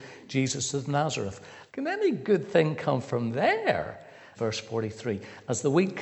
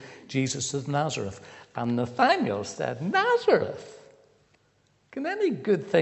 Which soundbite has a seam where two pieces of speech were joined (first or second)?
first